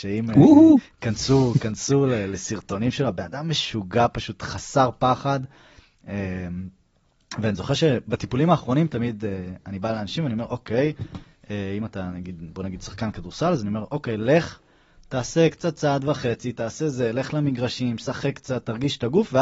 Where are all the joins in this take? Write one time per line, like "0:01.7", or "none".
none